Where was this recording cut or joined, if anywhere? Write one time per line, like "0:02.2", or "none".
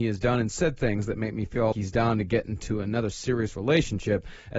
0:01.7